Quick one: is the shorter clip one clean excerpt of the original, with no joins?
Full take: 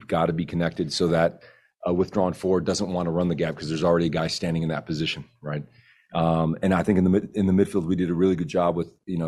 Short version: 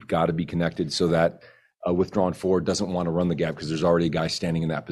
yes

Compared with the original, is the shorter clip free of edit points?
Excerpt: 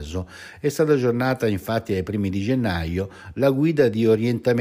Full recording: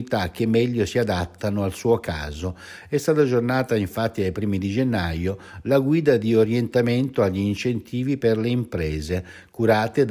yes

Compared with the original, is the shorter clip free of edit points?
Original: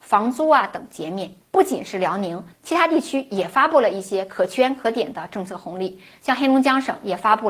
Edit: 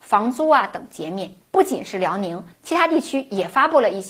yes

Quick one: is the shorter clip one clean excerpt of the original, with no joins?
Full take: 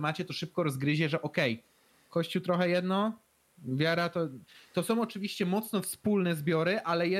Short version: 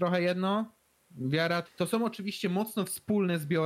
no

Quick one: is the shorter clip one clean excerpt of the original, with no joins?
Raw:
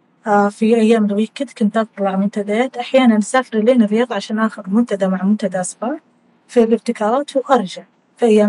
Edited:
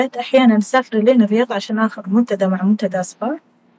yes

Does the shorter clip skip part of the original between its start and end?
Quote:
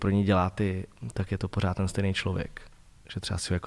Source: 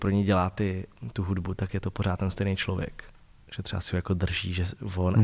yes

